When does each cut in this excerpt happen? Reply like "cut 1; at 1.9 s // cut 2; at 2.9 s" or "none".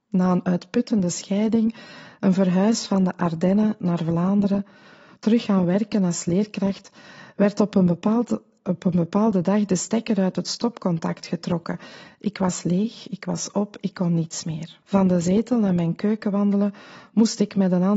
cut 1; at 14.8 s

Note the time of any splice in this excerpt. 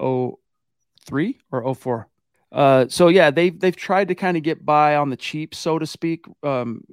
cut 1; at 2.3 s

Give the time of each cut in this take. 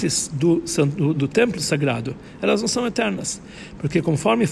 cut 1; at 1.1 s

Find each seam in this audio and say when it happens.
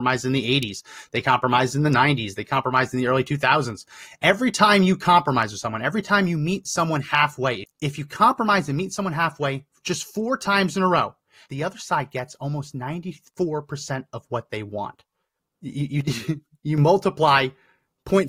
cut 1; at 7.6 s // cut 2; at 11.5 s // cut 3; at 15.4 s

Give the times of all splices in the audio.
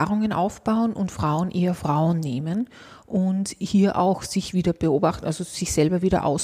none

